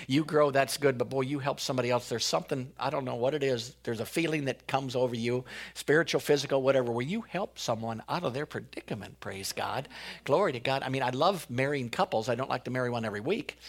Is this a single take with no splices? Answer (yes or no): yes